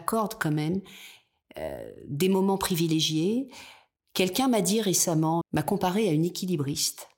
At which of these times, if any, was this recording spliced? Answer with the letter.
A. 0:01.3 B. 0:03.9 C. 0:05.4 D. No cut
C